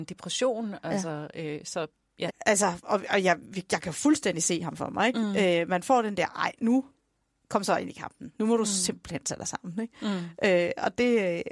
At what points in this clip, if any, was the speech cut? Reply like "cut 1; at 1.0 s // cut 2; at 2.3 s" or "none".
cut 1; at 2.3 s

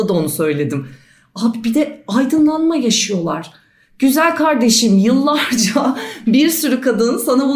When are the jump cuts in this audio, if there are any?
none

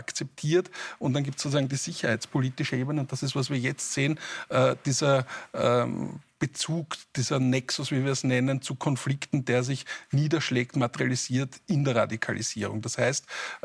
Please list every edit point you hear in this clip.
none

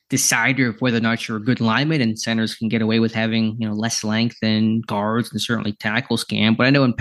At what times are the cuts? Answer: none

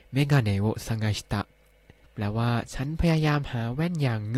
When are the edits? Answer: cut 1; at 2.1 s

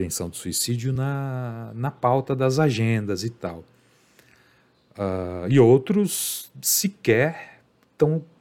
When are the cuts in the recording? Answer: none

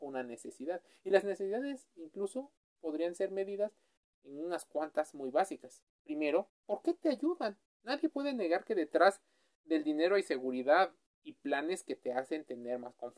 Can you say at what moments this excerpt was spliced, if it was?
none

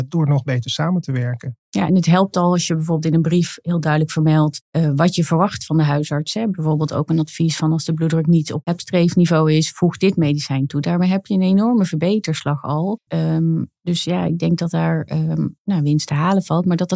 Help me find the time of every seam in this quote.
cut 1; at 13.1 s // cut 2; at 15.6 s

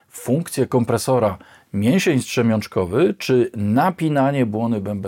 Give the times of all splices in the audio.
none

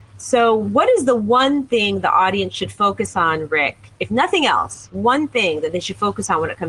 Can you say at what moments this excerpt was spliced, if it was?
none

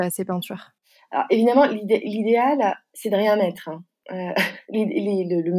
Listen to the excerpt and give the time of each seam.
none

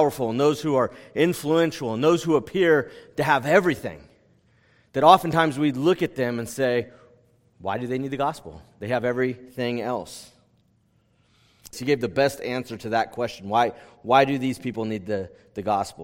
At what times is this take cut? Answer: cut 1; at 11.7 s

